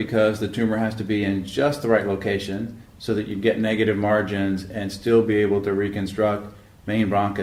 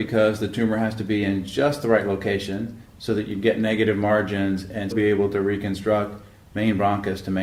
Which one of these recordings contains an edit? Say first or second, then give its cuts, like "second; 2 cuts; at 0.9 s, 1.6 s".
second; 1 cut; at 4.9 s